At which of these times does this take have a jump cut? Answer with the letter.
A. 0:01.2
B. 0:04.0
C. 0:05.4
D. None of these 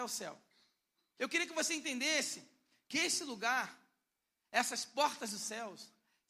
A